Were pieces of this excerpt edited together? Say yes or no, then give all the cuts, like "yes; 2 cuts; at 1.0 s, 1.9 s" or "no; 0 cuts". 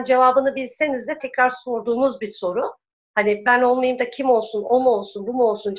yes; 1 cut; at 1.2 s